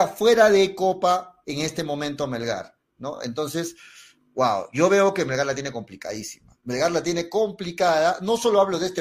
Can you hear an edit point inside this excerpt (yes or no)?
no